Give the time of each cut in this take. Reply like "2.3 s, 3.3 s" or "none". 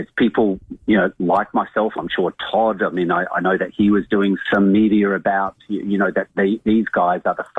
4.5 s